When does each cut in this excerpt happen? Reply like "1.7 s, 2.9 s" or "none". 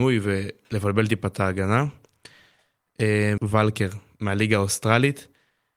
3.4 s